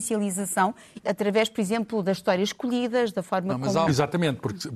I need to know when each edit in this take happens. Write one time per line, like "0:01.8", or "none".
0:01.0
0:03.9